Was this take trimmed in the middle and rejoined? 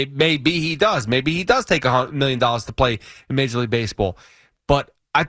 no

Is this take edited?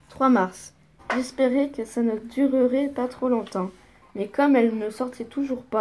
yes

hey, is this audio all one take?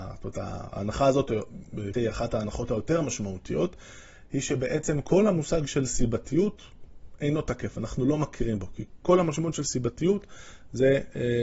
no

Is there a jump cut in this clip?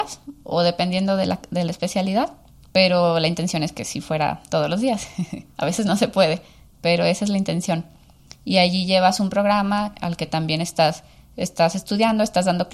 no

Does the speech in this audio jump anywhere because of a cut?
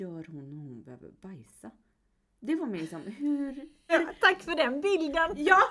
yes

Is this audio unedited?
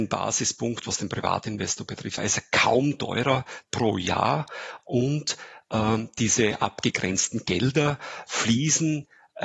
no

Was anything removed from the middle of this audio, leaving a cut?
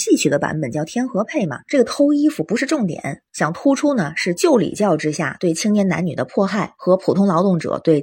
yes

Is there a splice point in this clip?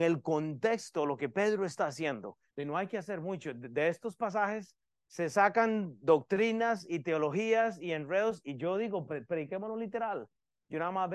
yes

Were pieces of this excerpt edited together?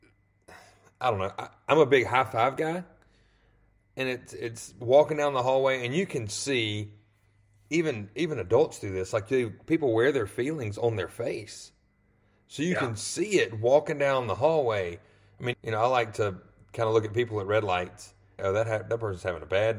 yes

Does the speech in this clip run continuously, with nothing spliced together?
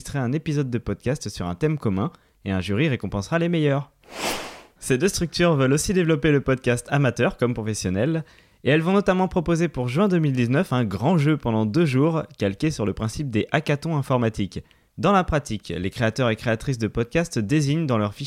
no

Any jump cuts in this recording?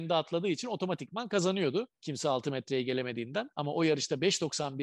yes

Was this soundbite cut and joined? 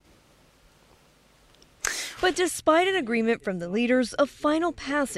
yes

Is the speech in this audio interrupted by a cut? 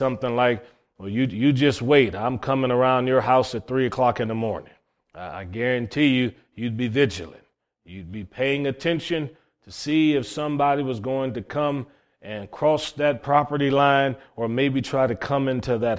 no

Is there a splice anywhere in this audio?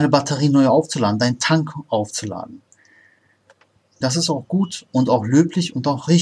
yes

